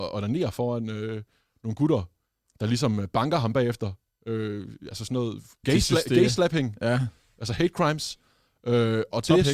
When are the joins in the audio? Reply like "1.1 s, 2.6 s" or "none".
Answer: 5.6 s